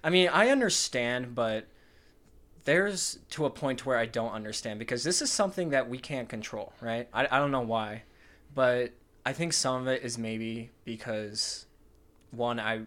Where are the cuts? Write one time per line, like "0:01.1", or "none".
0:07.1